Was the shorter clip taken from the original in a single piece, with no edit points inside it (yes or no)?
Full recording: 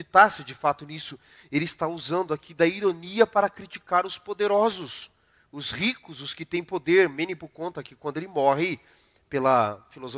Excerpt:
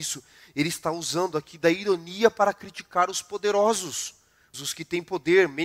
no